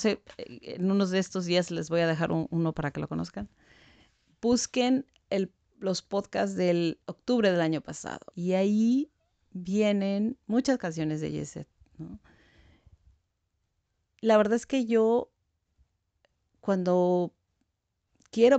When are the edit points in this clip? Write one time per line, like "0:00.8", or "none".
0:08.3